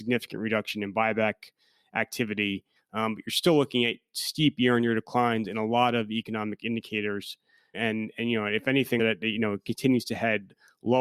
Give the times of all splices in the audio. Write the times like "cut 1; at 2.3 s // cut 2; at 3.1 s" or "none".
cut 1; at 2.8 s // cut 2; at 7.7 s // cut 3; at 9.0 s